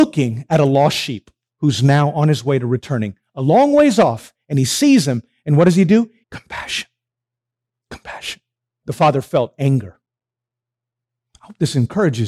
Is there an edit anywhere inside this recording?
yes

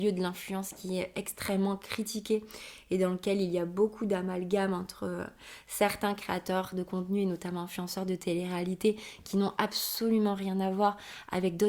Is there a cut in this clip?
no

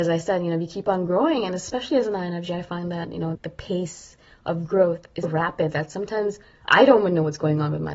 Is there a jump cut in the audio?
yes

